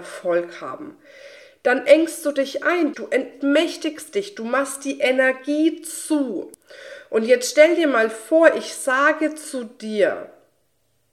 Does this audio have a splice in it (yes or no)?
yes